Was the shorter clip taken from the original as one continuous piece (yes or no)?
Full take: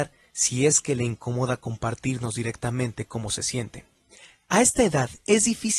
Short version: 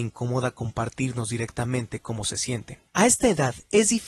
no